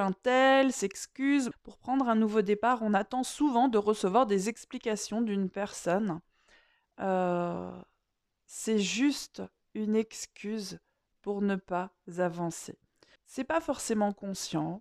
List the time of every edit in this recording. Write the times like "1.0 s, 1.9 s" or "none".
1.5 s, 13.2 s